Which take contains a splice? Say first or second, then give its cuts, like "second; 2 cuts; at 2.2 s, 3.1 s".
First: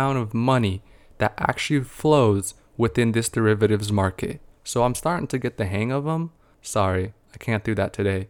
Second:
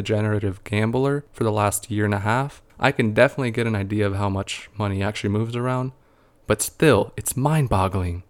first; 2 cuts; at 4.5 s, 6.5 s